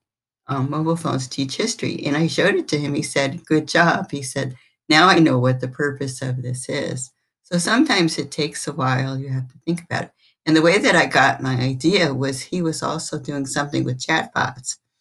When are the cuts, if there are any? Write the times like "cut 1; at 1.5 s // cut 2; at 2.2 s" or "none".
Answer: none